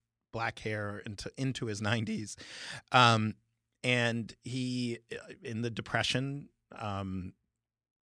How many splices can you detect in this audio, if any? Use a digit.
0